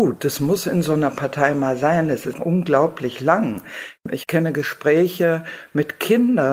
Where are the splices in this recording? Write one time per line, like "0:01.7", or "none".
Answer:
0:02.3